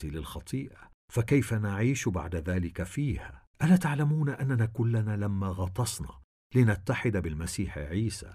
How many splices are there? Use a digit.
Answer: 1